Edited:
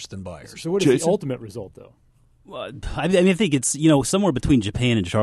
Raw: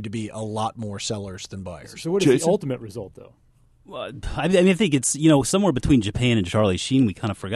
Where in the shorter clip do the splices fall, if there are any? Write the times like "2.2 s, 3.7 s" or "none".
none